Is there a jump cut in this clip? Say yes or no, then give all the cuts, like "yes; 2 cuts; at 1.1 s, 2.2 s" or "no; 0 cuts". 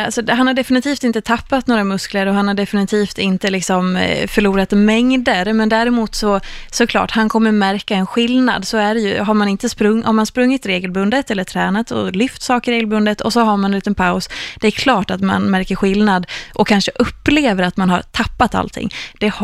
no; 0 cuts